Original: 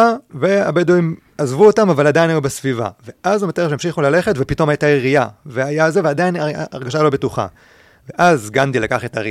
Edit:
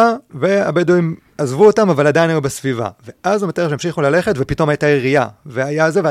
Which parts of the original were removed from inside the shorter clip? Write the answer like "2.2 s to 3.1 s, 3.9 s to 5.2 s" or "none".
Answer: none